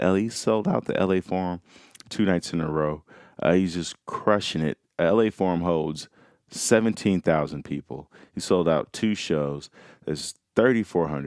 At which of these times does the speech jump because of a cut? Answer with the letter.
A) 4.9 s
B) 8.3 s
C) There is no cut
C